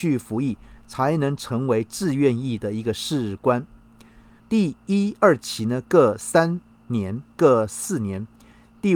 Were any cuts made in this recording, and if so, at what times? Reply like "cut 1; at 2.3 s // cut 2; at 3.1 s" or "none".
cut 1; at 4.4 s // cut 2; at 7.3 s

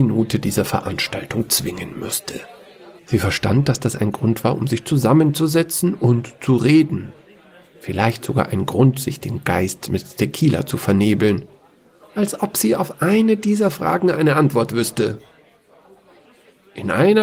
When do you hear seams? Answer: cut 1; at 3.0 s // cut 2; at 12.0 s

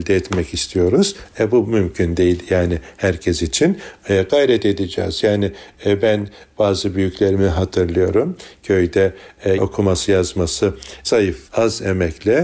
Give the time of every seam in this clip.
cut 1; at 9.6 s // cut 2; at 11.5 s

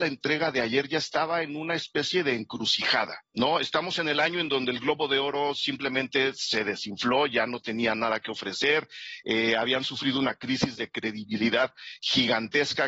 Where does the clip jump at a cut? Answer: cut 1; at 3.3 s

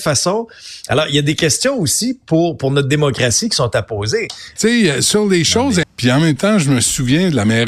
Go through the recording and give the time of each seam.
cut 1; at 4.6 s // cut 2; at 5.8 s

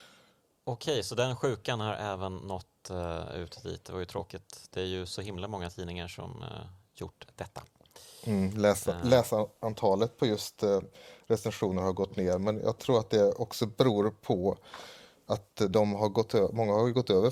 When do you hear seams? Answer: none

